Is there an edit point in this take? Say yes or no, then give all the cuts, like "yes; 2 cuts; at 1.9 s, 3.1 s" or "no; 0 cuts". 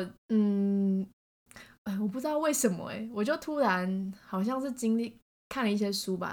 no; 0 cuts